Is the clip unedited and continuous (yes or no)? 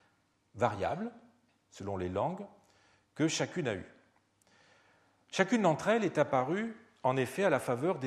yes